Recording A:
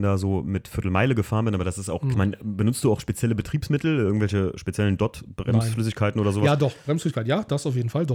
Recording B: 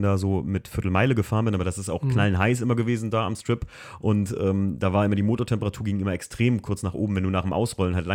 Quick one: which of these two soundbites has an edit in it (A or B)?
A